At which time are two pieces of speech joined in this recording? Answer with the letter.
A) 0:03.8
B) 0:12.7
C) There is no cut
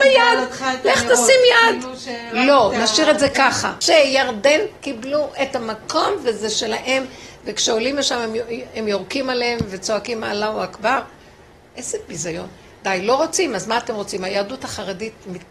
A